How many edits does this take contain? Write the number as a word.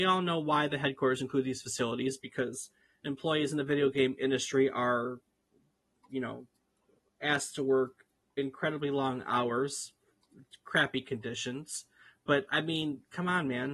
zero